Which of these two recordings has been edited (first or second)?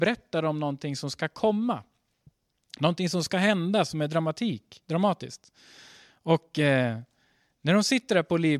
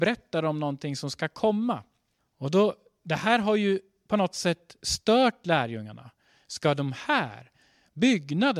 second